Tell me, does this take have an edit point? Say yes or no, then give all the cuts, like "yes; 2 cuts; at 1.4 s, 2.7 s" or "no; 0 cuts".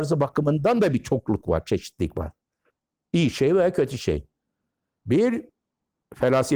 no; 0 cuts